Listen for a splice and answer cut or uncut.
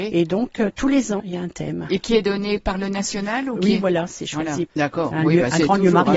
cut